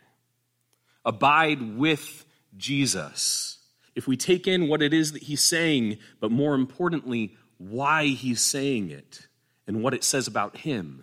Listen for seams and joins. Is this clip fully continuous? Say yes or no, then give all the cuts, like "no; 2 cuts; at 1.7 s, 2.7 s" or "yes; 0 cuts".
no; 1 cut; at 3.9 s